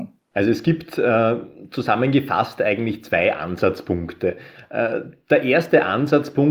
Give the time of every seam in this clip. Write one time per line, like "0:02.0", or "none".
none